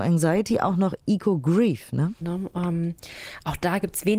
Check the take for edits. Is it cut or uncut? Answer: cut